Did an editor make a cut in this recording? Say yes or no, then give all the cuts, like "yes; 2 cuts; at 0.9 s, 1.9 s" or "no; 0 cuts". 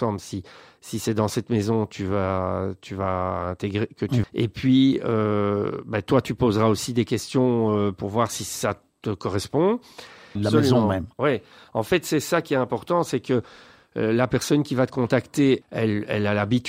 yes; 3 cuts; at 4.2 s, 10.4 s, 15.6 s